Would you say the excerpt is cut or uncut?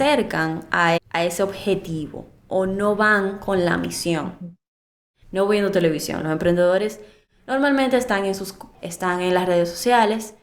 cut